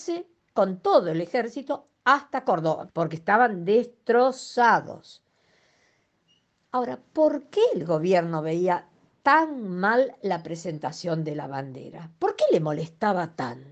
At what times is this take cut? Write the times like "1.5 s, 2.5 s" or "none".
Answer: 2.9 s